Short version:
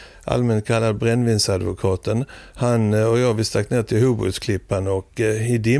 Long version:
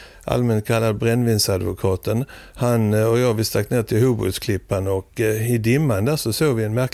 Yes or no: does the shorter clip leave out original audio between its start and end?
no